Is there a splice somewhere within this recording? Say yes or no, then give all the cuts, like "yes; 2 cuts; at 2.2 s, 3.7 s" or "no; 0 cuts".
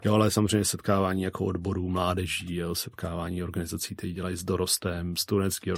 no; 0 cuts